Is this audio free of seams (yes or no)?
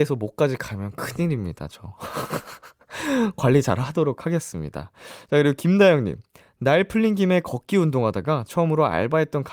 yes